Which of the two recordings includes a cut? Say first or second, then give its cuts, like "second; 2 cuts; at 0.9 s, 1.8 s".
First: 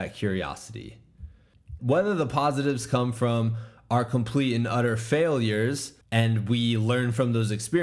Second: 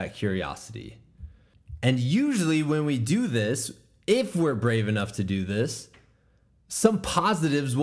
first; 2 cuts; at 1.8 s, 6.0 s